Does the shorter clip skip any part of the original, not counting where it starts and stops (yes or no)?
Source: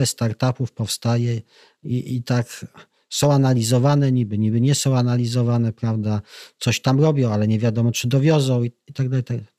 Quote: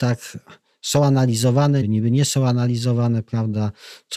yes